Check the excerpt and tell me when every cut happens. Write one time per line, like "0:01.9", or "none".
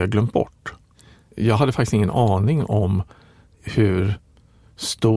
none

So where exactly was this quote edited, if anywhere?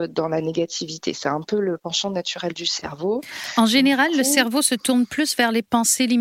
none

